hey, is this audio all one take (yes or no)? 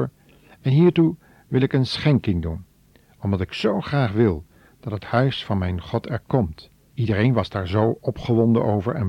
no